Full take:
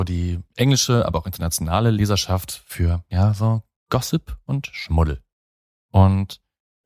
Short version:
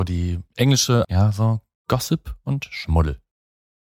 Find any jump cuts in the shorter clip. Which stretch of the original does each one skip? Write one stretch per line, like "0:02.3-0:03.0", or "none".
0:01.0-0:03.1